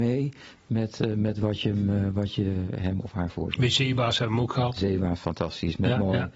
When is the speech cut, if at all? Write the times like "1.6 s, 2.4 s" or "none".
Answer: none